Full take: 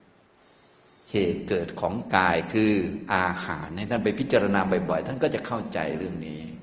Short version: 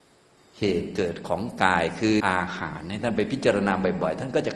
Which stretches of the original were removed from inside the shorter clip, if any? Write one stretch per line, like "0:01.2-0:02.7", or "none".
0:02.7-0:03.1